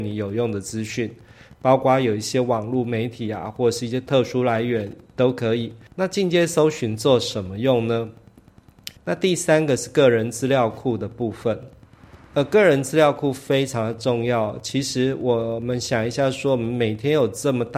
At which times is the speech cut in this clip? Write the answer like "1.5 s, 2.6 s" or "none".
5.9 s, 9.0 s